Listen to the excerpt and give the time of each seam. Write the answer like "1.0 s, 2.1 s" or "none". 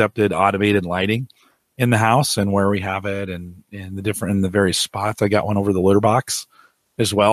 none